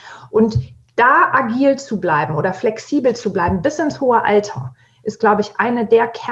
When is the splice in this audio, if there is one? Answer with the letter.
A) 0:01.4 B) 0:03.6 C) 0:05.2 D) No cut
B